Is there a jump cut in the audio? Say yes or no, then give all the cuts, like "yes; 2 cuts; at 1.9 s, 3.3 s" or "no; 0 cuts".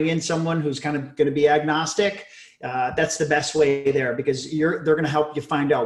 no; 0 cuts